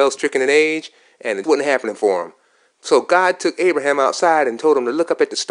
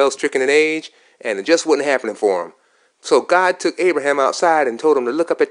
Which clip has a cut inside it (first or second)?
first